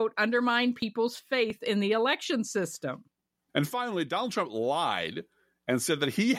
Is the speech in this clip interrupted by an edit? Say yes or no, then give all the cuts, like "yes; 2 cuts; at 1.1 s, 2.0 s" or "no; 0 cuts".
yes; 1 cut; at 3.5 s